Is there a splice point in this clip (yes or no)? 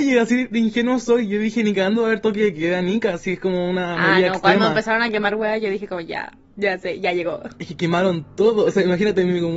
no